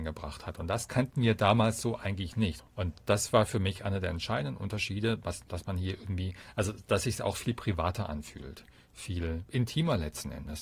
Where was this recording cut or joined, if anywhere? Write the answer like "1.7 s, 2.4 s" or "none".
2.6 s